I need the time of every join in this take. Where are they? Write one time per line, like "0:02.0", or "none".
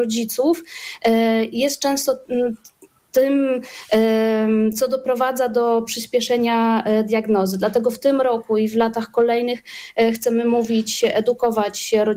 none